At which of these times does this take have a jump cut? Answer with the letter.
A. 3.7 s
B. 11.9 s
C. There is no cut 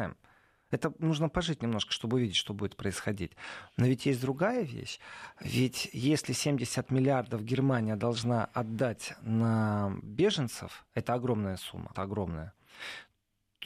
B